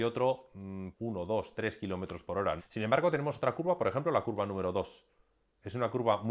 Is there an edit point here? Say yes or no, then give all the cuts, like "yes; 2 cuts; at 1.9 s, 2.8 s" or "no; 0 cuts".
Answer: yes; 2 cuts; at 0.9 s, 2.6 s